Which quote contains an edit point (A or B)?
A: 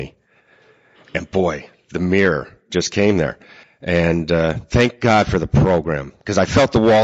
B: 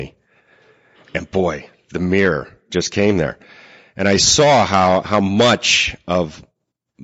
A